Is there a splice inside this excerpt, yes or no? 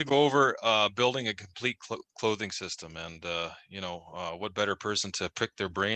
no